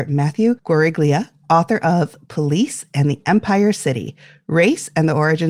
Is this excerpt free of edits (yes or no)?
yes